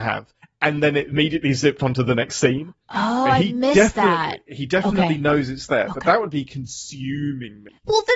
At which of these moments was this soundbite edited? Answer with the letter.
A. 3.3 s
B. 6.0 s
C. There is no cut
A